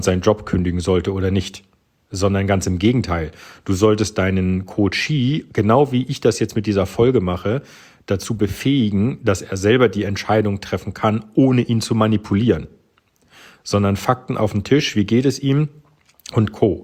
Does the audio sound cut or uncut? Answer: uncut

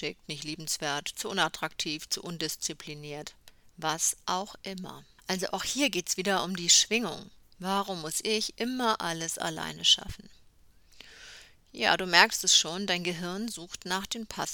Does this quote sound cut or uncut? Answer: cut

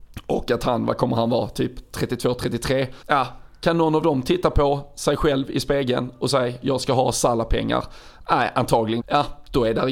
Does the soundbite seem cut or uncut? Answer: cut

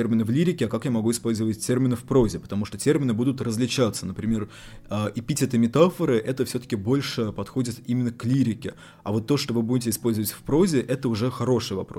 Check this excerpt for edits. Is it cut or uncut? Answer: uncut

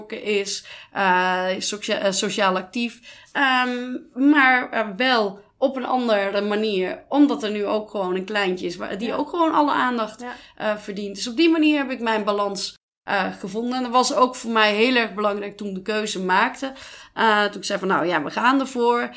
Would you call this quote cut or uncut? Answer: uncut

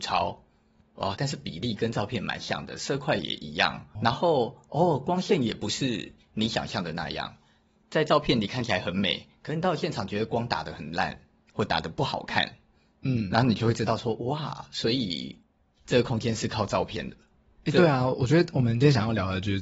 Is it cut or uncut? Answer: cut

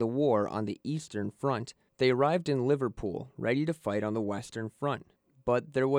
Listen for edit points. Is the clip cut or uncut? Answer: cut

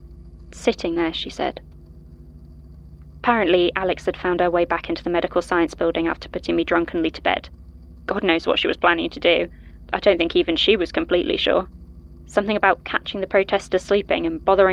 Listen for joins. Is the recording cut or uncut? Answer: uncut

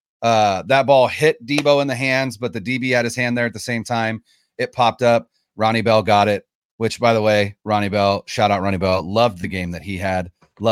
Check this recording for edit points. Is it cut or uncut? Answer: uncut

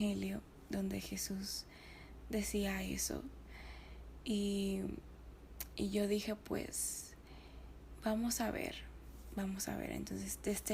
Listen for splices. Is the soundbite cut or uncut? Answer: uncut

